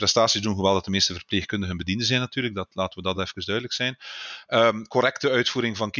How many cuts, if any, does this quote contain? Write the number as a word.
zero